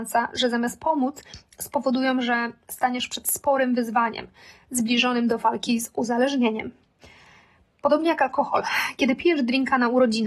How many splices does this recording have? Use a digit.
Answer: 0